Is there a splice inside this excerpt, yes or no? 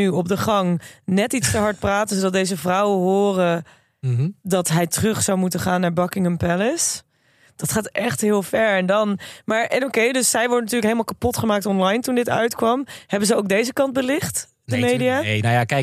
no